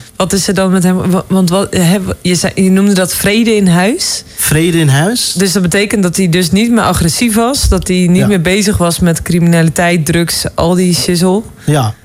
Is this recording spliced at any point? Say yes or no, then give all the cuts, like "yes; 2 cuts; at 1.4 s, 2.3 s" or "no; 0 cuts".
no; 0 cuts